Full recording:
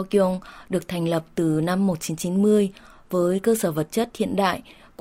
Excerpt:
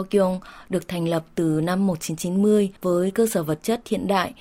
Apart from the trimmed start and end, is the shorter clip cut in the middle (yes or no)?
yes